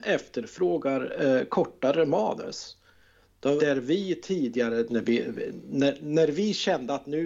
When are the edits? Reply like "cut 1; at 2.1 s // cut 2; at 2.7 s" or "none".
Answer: cut 1; at 3.6 s // cut 2; at 4.9 s